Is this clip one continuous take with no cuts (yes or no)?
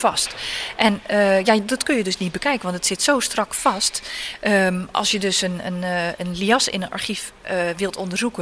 yes